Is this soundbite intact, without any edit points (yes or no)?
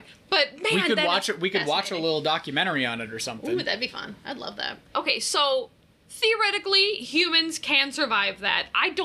no